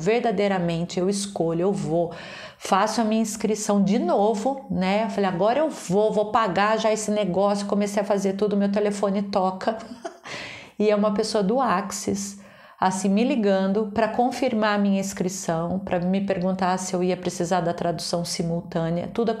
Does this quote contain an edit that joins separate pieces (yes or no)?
no